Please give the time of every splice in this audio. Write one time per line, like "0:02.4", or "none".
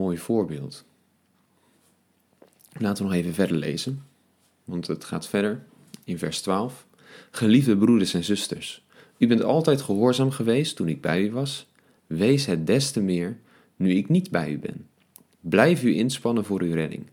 none